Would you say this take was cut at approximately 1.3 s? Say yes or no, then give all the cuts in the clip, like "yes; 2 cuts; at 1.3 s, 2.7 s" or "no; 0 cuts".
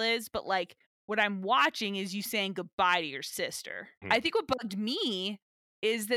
no; 1 cut; at 4.0 s